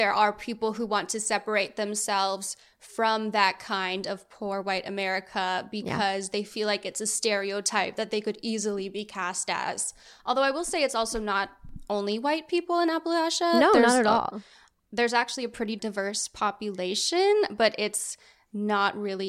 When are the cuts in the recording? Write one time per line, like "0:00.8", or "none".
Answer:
none